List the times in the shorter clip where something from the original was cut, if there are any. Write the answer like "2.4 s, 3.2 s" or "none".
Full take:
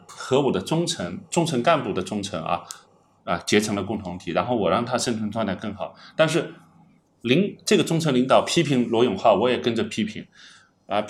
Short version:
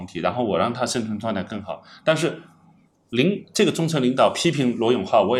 none